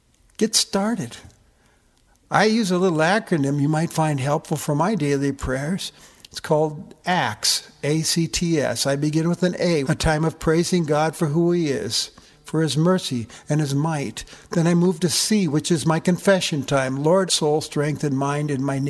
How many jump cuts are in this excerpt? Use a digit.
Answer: 2